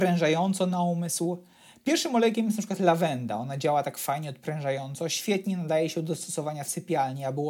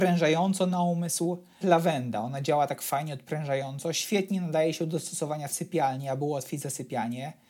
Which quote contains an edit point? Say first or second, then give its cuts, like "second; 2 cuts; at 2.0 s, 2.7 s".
second; 1 cut; at 1.6 s